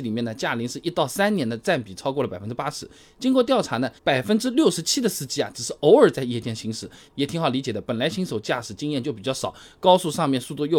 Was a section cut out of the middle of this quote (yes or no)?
yes